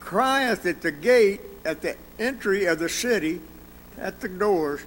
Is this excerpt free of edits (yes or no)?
no